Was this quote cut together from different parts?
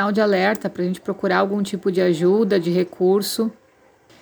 no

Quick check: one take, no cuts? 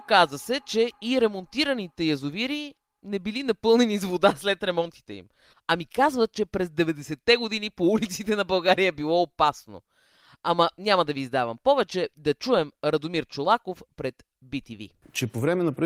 no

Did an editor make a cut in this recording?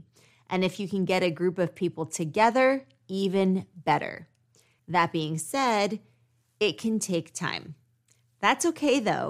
yes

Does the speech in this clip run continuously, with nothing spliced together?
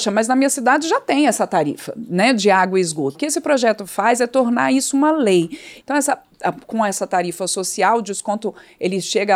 no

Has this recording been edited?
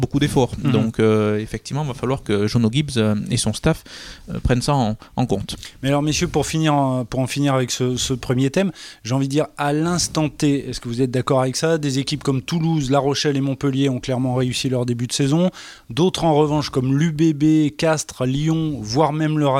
no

